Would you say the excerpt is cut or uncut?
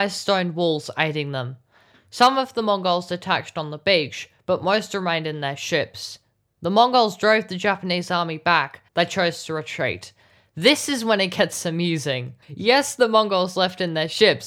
cut